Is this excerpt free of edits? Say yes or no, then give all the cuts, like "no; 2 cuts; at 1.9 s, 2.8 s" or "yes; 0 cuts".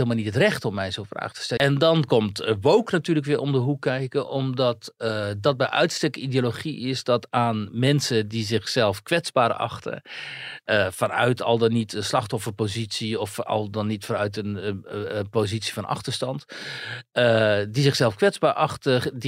no; 1 cut; at 1.6 s